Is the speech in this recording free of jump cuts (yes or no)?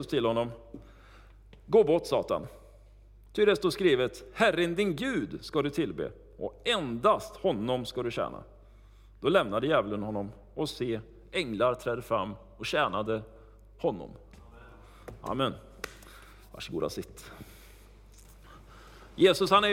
yes